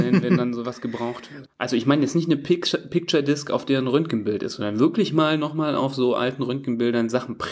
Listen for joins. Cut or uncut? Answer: cut